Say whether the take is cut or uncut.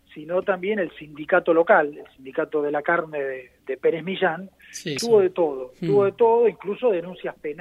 cut